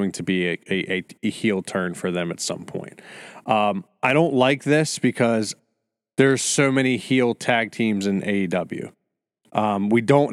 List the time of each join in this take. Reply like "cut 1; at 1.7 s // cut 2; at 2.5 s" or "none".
none